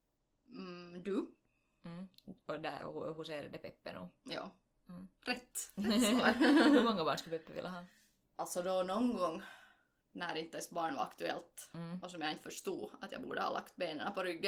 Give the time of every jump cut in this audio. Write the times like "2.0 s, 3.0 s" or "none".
none